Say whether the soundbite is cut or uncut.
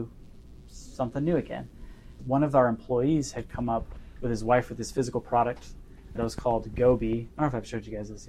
cut